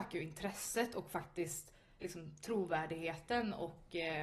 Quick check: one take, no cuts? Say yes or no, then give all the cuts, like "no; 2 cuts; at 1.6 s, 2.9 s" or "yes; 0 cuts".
no; 1 cut; at 2.0 s